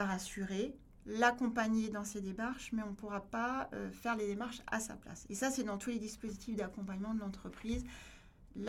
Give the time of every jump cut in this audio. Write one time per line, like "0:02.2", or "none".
0:05.3